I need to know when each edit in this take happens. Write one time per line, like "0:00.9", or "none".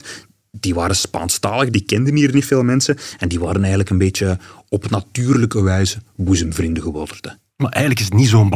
none